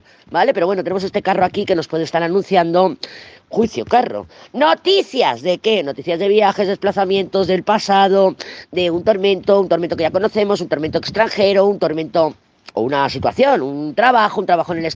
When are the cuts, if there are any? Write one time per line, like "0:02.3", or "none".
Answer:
none